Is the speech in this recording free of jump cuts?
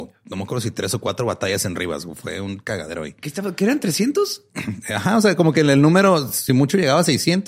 yes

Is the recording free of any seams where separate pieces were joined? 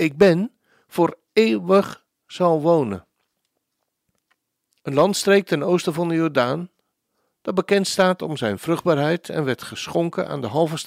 no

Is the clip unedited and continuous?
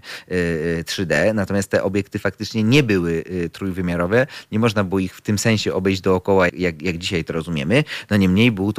no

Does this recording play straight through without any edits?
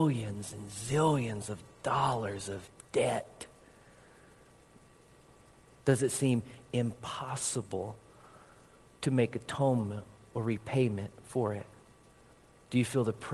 yes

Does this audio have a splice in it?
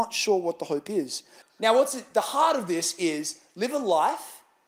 yes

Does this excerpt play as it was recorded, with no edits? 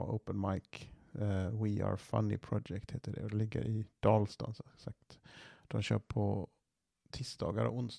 yes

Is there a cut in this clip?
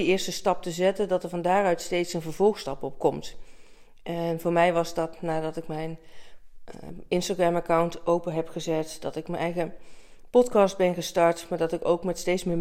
no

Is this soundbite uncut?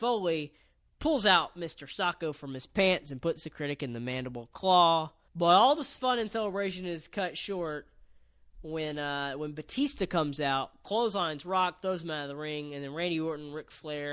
no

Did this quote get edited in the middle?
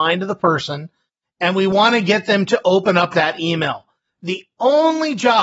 no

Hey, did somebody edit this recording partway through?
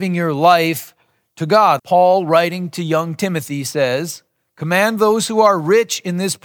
yes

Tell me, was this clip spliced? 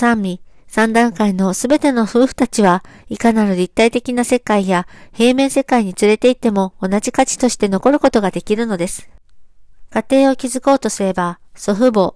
no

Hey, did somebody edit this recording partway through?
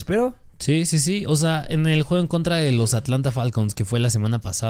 no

